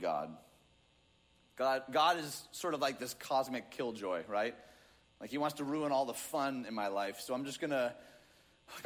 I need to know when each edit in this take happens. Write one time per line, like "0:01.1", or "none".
none